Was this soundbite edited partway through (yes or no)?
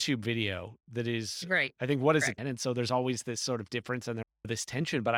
yes